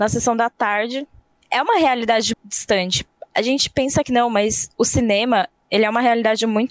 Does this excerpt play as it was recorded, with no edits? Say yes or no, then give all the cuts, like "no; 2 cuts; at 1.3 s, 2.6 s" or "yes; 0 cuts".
no; 1 cut; at 2.3 s